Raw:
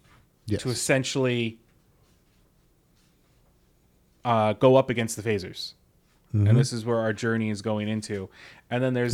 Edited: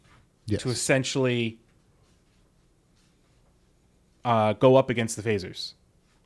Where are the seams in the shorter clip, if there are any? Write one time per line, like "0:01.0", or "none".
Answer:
none